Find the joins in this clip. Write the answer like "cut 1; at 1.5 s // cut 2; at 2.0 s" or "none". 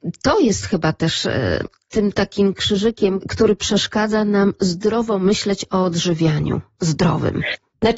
cut 1; at 3.2 s